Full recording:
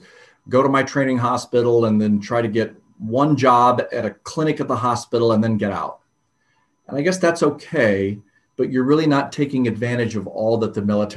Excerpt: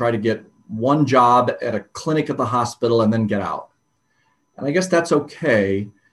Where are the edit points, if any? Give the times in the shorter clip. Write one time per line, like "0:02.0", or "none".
none

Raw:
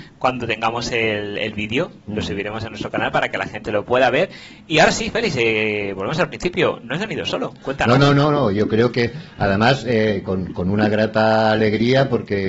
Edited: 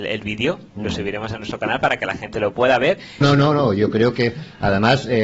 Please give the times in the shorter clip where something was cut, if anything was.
0:03.2

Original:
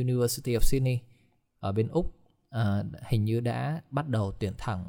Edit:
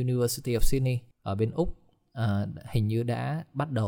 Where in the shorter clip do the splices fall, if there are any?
0:01.1

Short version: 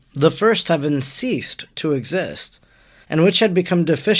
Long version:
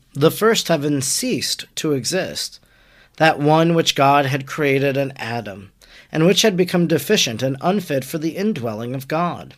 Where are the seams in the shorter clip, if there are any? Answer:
0:03.0

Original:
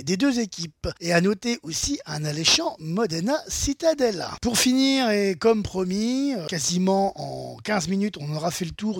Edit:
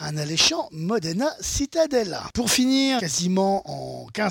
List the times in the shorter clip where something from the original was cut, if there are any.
0:03.0

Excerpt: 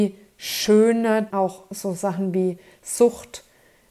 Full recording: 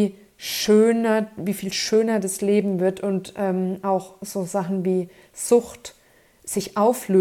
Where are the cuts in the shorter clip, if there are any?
0:01.3

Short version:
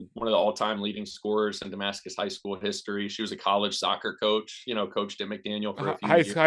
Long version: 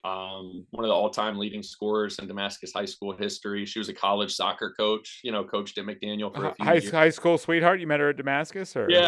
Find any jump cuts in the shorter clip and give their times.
none

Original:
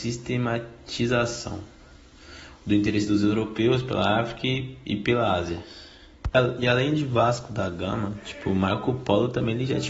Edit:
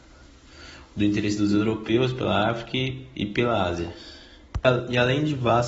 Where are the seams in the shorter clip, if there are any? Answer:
none

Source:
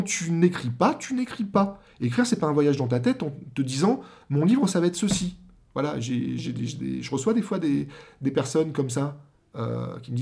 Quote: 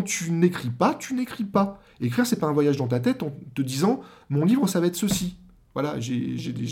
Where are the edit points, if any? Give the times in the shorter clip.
none

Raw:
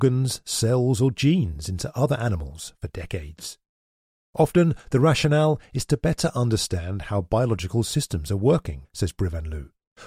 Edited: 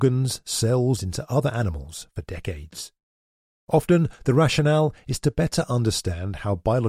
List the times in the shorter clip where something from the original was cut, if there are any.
0:01.0

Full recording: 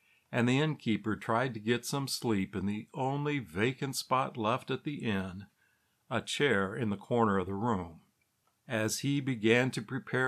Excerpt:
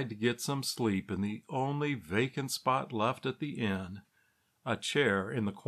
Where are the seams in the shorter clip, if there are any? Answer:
none

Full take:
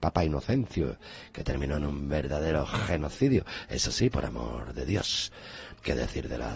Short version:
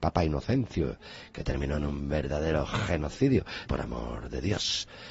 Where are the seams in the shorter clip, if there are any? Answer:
0:03.7

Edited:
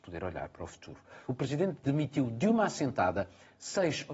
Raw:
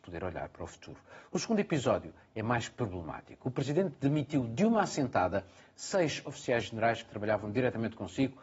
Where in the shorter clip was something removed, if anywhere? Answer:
0:01.3

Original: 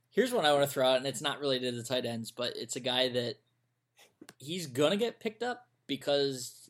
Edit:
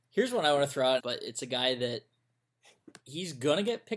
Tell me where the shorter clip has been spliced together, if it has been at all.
0:01.0

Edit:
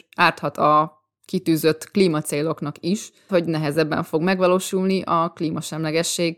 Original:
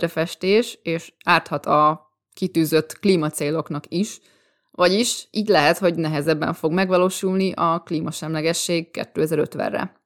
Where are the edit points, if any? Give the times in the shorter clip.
0:03.3

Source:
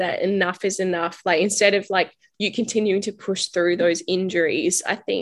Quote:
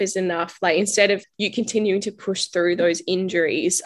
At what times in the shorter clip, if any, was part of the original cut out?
0:01.2

